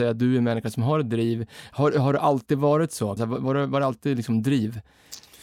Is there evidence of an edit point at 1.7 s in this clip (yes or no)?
no